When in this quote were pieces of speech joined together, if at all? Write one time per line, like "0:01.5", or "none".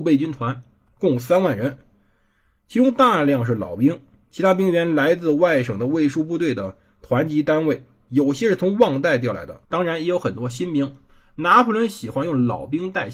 0:09.6